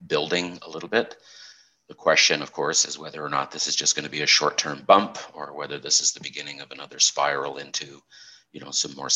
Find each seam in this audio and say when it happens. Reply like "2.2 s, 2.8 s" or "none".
none